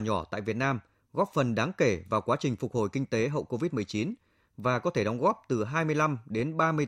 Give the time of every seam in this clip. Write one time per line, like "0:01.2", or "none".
none